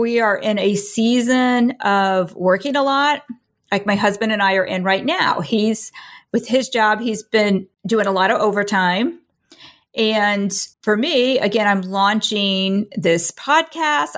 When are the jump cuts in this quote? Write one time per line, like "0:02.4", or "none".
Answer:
0:07.7
0:10.7